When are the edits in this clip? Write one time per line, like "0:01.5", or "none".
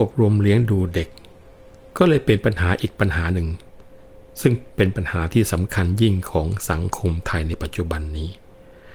none